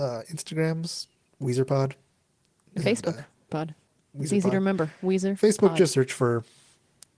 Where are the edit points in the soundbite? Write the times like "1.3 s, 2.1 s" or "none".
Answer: 3.5 s